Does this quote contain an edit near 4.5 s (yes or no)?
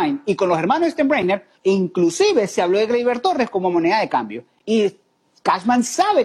no